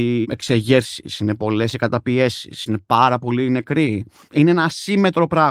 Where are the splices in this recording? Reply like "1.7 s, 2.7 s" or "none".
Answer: 2.7 s